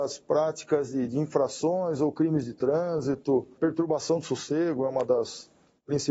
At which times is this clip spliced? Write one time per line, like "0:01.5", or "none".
0:01.1
0:03.6